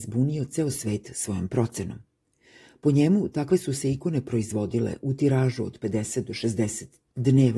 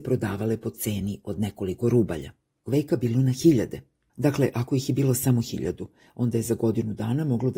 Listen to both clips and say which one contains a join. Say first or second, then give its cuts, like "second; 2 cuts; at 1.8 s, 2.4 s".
second; 1 cut; at 2.7 s